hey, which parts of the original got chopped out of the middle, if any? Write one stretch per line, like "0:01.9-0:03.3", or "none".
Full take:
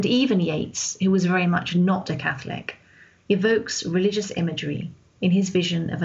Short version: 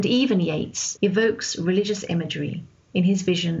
0:01.0-0:03.2

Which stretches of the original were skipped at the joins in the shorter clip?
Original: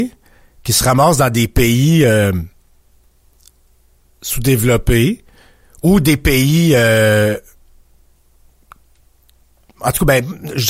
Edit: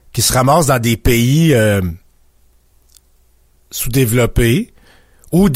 none

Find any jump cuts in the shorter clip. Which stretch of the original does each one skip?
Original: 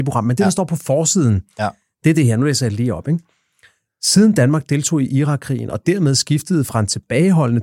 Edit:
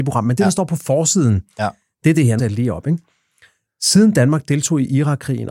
0:02.4-0:02.6

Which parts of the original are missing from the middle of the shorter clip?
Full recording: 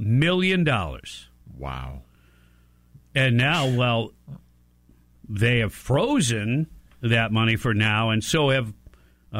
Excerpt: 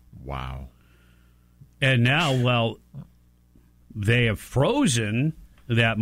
none

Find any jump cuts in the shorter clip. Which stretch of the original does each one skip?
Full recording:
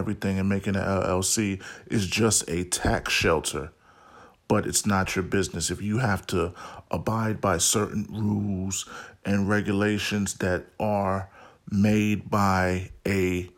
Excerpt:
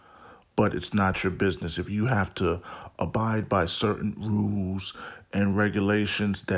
none

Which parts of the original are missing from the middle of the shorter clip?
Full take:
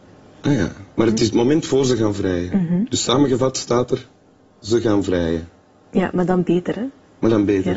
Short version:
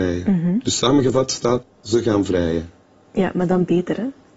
0:03.9-0:04.4

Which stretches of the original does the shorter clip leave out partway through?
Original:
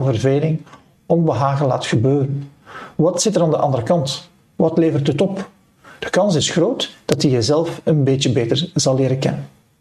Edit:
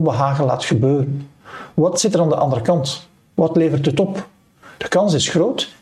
none

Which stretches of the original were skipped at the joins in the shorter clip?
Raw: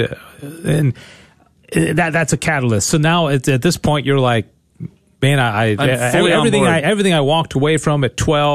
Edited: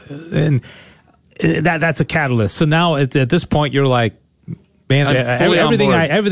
0:05.4-0:05.8

